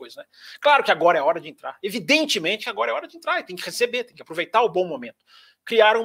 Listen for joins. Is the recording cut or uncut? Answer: uncut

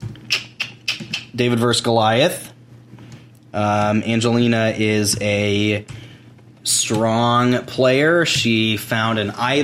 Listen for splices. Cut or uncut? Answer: uncut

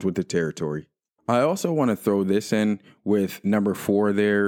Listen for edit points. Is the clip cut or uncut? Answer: uncut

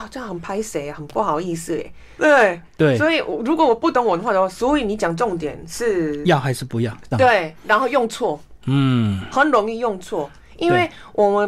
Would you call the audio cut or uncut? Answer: cut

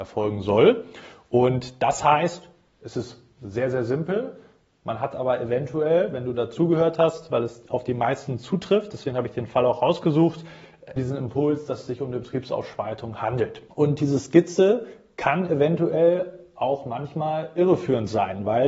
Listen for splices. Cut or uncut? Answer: cut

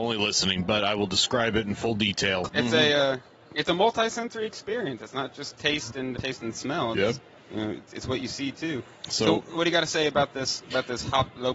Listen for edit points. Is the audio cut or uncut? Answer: cut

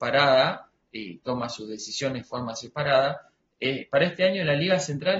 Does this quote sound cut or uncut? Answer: uncut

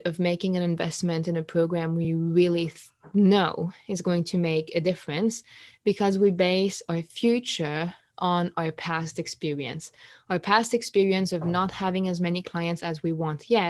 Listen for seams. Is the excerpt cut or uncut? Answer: uncut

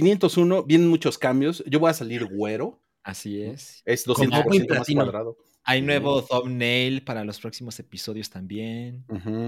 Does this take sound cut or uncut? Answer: cut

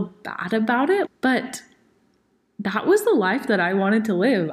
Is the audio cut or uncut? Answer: cut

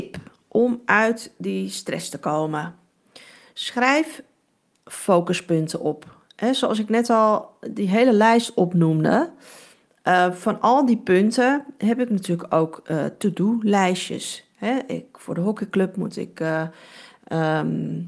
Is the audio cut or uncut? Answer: uncut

